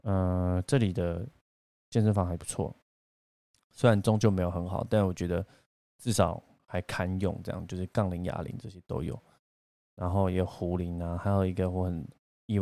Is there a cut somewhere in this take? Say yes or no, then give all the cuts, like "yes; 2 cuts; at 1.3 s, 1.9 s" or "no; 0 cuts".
no; 0 cuts